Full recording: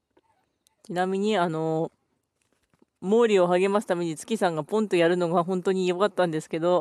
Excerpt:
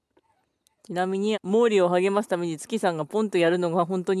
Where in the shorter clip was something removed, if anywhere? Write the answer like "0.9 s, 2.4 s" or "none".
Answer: 1.3 s

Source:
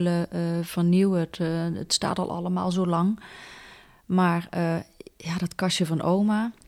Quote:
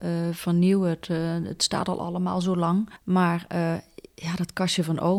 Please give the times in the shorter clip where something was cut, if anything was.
3.0 s

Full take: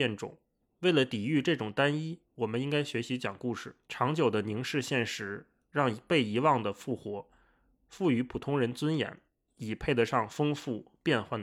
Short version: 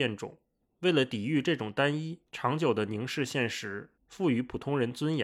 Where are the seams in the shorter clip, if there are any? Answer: 2.3 s, 4.0 s

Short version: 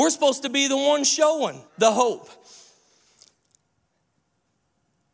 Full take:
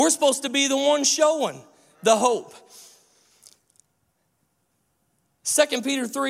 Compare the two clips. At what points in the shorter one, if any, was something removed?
1.7 s

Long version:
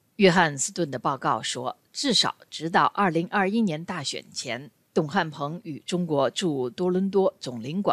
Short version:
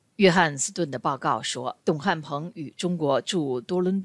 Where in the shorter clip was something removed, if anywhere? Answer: 1.8 s

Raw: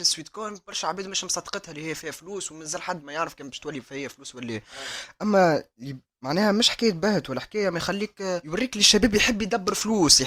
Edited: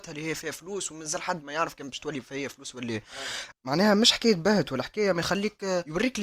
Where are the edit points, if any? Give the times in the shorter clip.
3.5 s

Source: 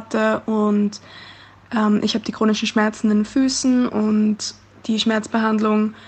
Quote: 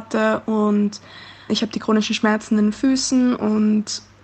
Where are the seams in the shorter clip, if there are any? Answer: 1.5 s

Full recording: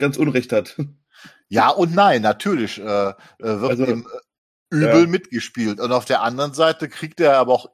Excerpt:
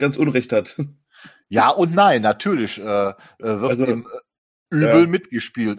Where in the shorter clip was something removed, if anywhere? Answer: none

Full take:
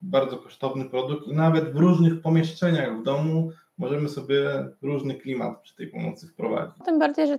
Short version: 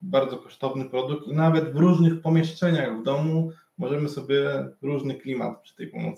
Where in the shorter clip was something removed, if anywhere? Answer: none

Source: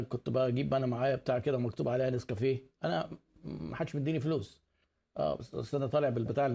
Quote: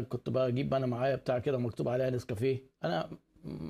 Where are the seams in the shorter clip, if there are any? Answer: none

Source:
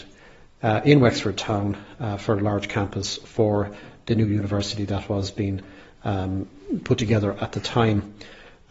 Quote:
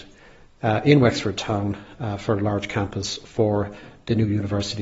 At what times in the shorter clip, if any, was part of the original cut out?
none

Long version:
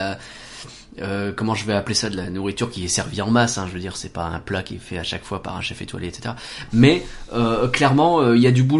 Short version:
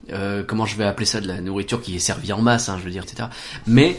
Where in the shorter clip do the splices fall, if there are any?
3.0 s

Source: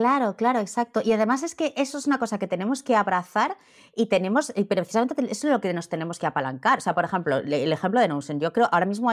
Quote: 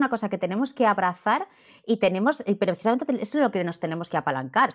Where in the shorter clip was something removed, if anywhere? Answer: none

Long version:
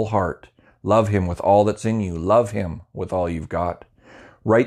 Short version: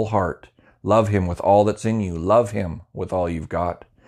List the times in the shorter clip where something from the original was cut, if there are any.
none

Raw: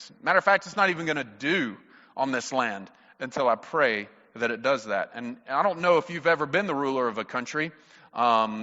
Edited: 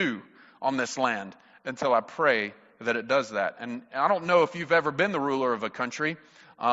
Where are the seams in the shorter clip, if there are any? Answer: none

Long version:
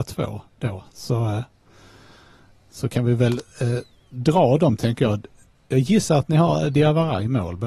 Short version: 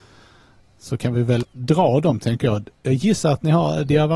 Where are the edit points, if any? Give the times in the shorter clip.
1.4 s, 2.7 s

